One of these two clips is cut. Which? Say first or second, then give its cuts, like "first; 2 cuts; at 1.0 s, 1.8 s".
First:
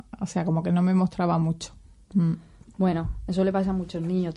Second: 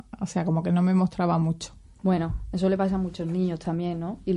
second; 1 cut; at 2.0 s